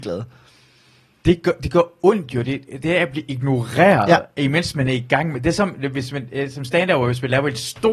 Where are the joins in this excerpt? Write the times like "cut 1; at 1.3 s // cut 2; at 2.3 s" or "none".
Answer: none

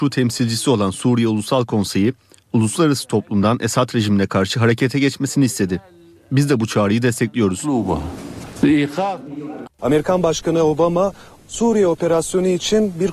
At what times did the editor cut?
cut 1; at 9.6 s

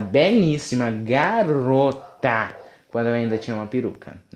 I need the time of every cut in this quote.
none

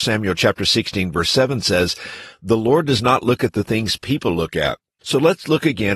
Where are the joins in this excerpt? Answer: cut 1; at 5.0 s

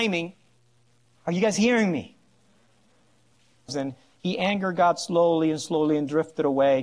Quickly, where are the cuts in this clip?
cut 1; at 1.1 s // cut 2; at 3.7 s

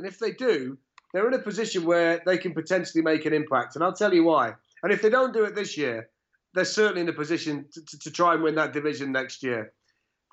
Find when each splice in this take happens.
none

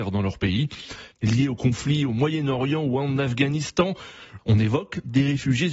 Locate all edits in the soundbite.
cut 1; at 1.1 s // cut 2; at 4.4 s

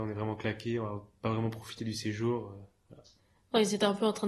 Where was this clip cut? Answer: none

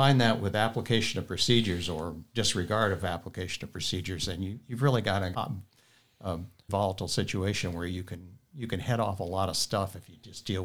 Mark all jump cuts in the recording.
cut 1; at 5.3 s // cut 2; at 6.7 s

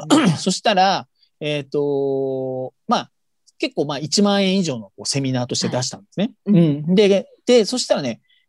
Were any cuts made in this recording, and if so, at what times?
none

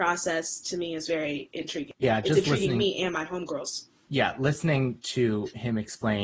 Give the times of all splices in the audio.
none

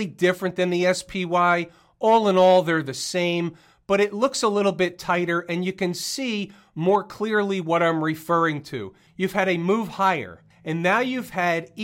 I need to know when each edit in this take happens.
none

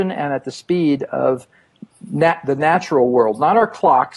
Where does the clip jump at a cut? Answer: none

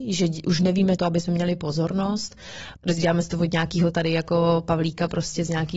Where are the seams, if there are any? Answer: cut 1; at 1.0 s // cut 2; at 2.8 s

